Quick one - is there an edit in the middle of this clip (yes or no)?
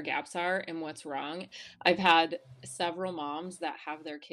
yes